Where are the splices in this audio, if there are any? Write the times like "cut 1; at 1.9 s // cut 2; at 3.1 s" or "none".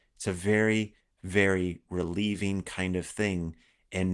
none